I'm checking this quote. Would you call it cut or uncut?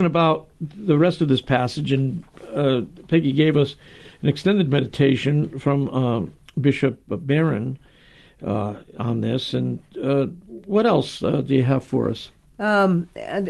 uncut